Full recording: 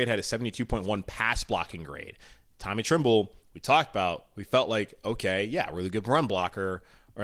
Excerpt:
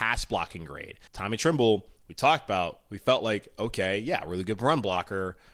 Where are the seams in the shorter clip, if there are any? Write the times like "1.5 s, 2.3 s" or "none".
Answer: 1.1 s

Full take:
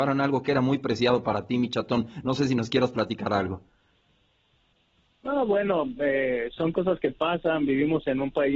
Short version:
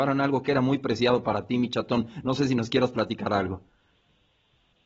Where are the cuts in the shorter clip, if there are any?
none

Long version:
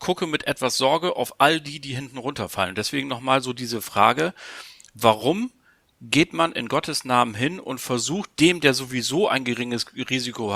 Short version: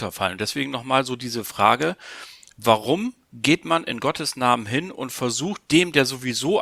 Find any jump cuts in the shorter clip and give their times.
3.2 s

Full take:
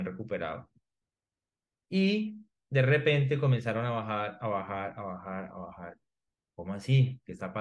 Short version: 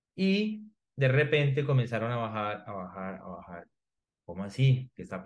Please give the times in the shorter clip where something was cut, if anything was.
2.6 s

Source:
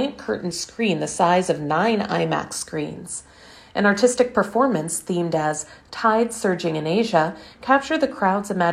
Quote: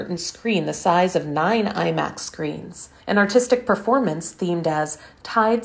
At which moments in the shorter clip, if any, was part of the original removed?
3.0 s

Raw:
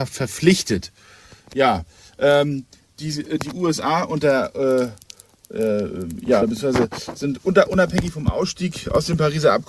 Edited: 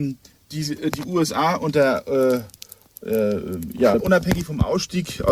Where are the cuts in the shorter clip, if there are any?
4.0 s

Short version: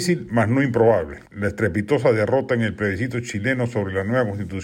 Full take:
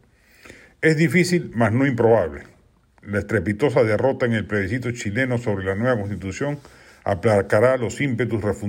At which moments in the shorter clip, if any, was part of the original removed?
1.3 s

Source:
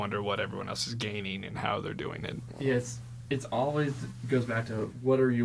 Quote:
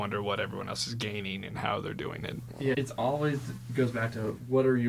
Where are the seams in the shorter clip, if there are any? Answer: 2.7 s

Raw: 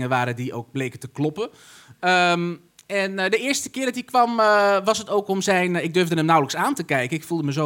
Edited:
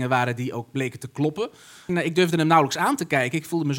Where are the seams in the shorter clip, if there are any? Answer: 1.9 s

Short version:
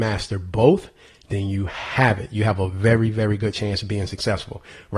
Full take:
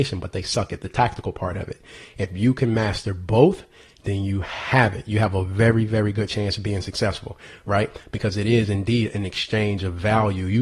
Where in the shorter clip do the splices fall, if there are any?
none

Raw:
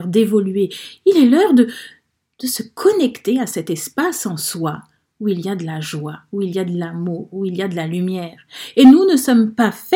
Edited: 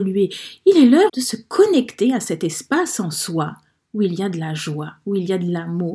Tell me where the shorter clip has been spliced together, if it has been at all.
1.1 s

